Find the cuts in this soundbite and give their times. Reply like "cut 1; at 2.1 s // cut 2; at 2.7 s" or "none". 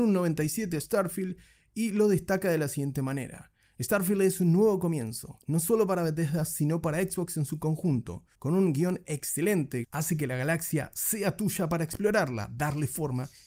cut 1; at 8.3 s // cut 2; at 9.8 s